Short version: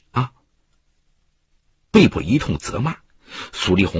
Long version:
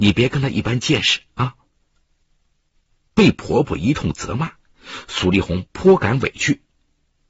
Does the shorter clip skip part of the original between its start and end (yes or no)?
yes